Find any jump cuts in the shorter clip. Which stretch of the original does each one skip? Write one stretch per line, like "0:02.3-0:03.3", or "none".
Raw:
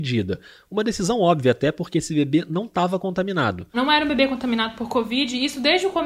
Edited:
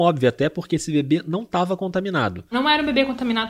none